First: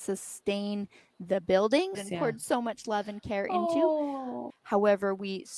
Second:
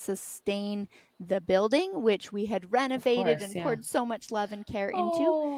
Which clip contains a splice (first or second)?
first